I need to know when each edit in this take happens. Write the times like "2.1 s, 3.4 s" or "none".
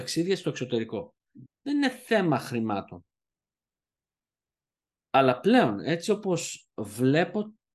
1.5 s